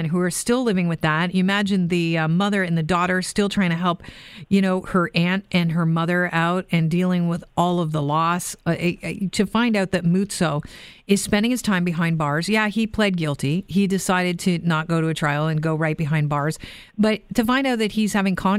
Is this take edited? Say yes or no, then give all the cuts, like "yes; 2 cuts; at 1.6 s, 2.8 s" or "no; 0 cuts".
no; 0 cuts